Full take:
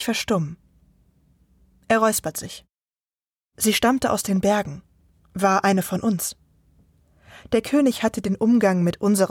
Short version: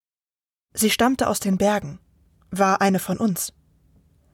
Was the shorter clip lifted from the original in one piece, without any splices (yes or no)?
yes